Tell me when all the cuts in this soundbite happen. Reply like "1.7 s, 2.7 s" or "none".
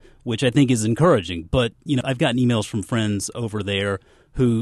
2.0 s